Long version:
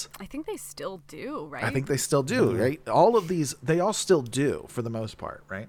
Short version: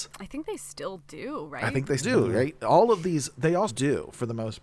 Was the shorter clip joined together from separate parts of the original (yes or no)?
yes